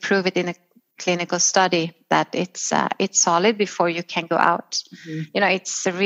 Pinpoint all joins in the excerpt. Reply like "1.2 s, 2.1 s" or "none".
none